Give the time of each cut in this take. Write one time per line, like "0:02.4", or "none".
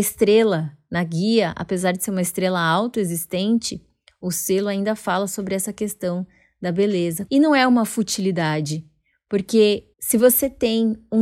0:07.3
0:09.9